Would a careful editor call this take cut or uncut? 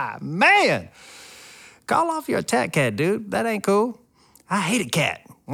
uncut